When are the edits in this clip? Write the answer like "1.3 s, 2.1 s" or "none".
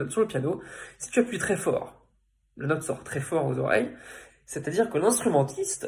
4.3 s